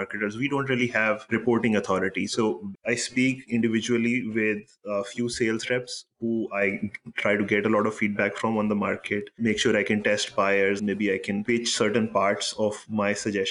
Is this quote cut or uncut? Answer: cut